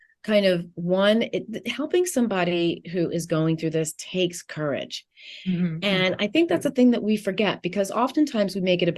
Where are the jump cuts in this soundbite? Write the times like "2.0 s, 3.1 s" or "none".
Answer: none